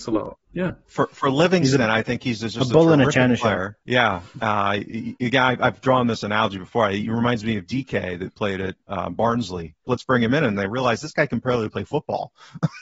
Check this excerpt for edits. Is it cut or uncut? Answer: cut